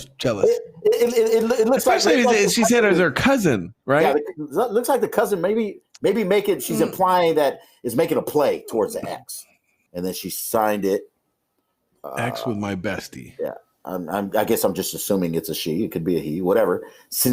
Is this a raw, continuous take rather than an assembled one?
no; 1 cut; at 9.9 s

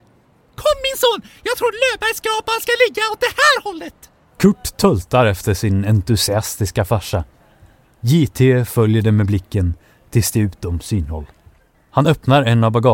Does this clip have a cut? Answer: yes; 1 cut; at 11.7 s

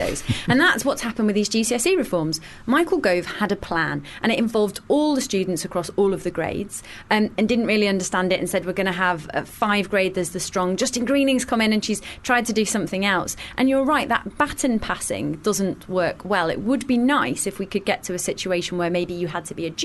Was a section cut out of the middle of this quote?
yes; 1 cut; at 7.4 s

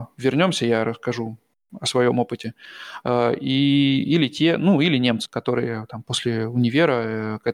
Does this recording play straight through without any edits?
no; 2 cuts; at 3.0 s, 5.3 s

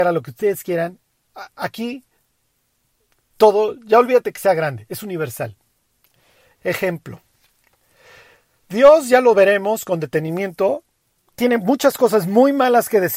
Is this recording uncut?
yes; 0 cuts

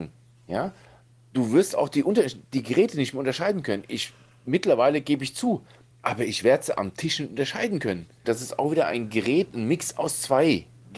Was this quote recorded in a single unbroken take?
no; 2 cuts; at 5.9 s, 8.2 s

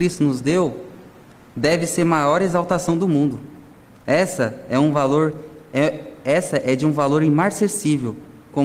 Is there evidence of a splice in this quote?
no; 0 cuts

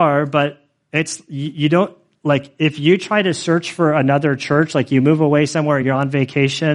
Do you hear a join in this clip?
no; 0 cuts

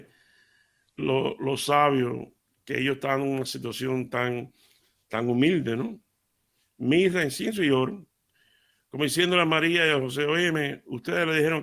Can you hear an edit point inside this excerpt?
no; 0 cuts

